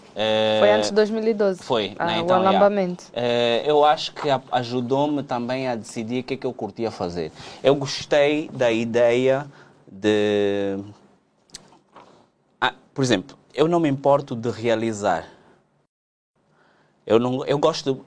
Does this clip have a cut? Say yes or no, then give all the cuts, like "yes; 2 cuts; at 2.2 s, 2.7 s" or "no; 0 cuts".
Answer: yes; 2 cuts; at 3.6 s, 13.5 s